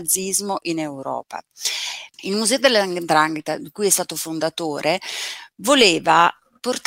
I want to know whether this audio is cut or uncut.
cut